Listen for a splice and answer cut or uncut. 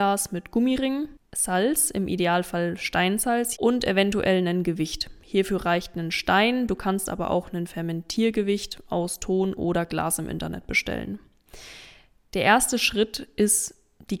cut